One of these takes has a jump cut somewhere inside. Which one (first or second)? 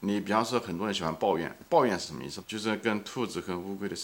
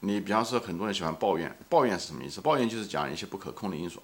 first